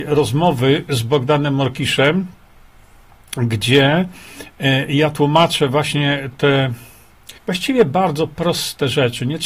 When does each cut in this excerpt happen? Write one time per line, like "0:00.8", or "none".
0:07.4